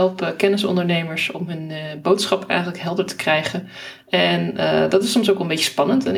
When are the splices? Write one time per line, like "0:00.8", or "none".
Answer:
0:04.0